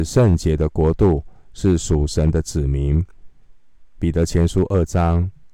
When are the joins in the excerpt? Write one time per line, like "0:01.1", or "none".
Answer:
none